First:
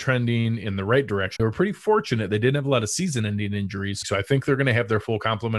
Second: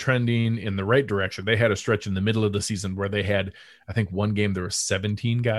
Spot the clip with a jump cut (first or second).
first